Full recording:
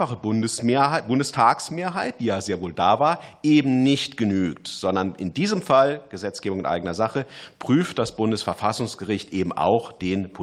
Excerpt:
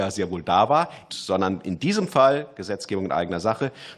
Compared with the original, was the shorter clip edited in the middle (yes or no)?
yes